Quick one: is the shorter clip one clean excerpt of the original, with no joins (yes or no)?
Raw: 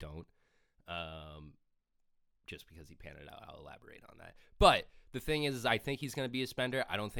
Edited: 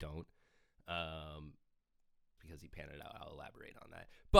no